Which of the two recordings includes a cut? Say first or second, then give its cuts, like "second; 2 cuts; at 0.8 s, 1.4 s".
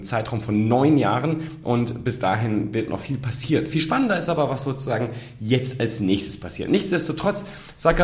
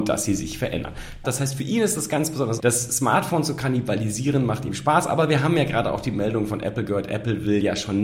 second; 2 cuts; at 1.2 s, 2.6 s